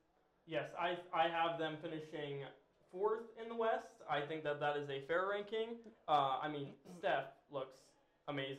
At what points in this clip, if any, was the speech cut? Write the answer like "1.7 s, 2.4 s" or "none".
none